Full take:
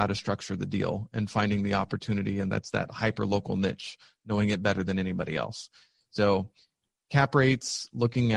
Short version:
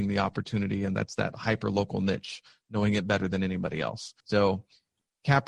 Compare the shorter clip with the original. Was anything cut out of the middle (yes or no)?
yes